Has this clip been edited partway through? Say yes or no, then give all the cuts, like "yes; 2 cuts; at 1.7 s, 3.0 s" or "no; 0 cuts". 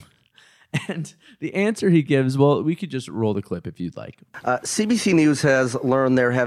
no; 0 cuts